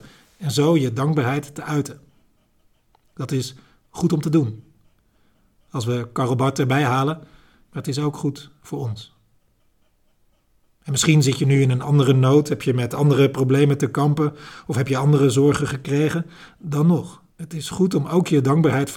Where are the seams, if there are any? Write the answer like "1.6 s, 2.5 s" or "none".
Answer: 7.7 s, 17.3 s